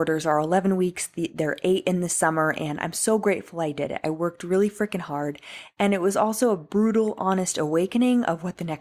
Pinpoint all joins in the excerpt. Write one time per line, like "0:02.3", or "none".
none